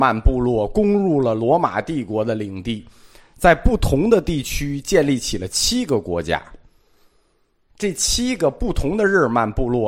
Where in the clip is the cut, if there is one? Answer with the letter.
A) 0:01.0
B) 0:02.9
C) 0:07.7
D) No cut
C